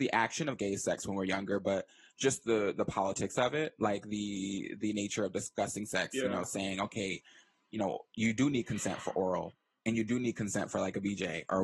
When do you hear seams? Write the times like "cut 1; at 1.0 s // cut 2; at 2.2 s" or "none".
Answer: none